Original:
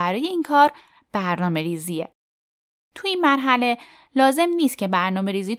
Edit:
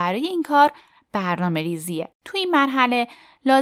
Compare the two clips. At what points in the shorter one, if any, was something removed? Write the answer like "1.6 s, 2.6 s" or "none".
2.1 s